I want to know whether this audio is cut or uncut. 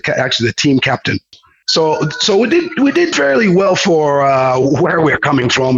uncut